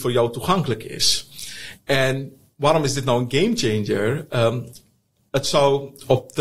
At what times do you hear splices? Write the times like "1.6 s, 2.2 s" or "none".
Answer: none